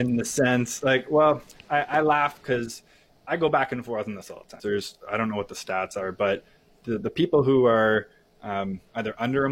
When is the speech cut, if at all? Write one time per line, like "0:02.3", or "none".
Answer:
0:04.6